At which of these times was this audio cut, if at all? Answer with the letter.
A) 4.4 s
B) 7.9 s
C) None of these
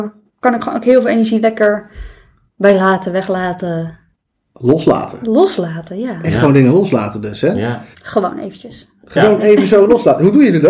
B